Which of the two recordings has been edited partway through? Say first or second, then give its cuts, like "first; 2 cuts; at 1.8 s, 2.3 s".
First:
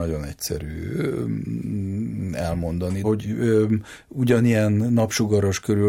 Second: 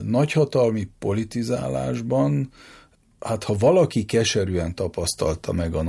first; 1 cut; at 3.0 s